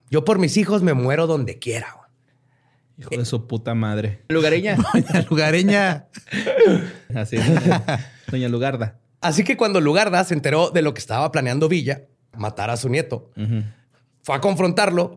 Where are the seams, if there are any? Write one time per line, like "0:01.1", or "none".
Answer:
0:04.3
0:07.1
0:12.3